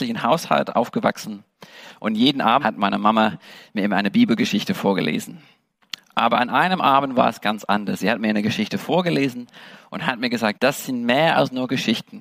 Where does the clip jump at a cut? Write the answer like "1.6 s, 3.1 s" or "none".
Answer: 2.6 s, 10.5 s